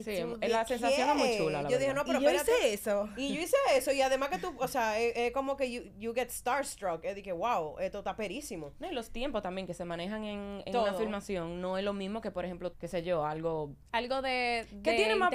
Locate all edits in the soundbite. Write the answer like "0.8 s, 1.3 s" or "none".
12.7 s, 13.9 s